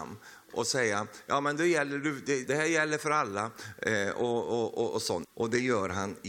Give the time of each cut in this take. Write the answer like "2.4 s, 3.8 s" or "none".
2.4 s, 5.2 s